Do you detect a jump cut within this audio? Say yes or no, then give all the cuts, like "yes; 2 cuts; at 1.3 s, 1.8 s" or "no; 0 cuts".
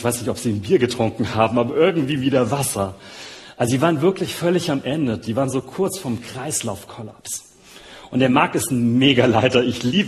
no; 0 cuts